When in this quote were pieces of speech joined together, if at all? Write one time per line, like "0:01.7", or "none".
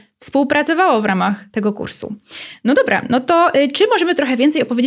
none